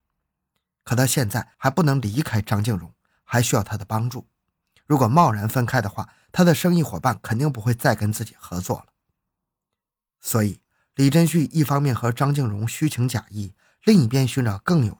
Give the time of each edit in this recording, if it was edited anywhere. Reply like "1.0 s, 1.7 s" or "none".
none

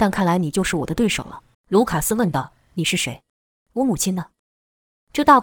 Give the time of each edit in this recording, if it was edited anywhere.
1.5 s

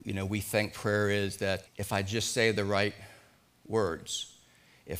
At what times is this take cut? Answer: 1.7 s

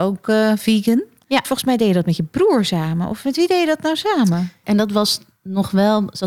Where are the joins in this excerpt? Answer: 1.4 s, 4.6 s

